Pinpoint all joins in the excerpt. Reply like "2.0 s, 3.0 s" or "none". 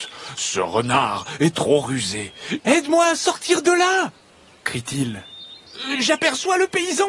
2.6 s, 5.9 s